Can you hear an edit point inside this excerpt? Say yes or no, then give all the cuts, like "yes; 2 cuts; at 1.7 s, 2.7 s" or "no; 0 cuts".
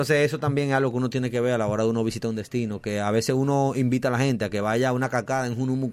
no; 0 cuts